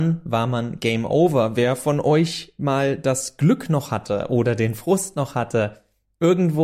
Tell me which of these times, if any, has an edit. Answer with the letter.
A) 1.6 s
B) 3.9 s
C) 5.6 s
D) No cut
D